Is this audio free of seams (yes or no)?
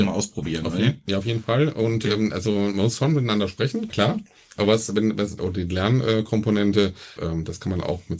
no